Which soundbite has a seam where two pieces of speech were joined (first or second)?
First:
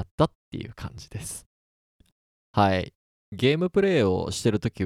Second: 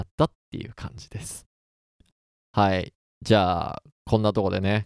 first